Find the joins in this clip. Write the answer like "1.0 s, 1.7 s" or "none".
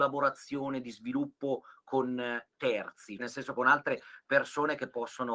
3.2 s